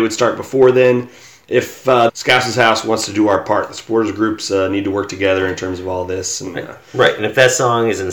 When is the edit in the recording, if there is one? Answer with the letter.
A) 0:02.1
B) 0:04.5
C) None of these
A